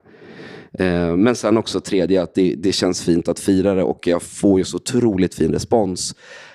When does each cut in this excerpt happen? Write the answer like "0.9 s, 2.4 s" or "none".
none